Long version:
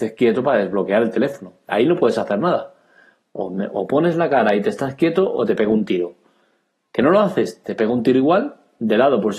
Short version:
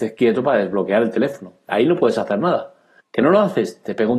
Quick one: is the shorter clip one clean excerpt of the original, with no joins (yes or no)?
no